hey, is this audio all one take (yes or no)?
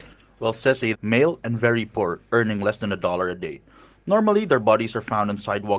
no